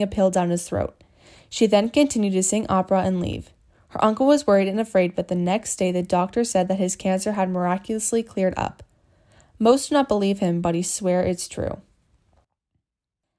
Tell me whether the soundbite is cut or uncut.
uncut